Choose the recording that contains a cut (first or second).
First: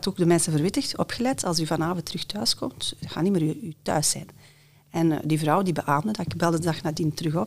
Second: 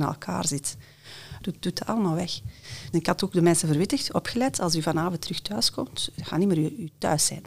second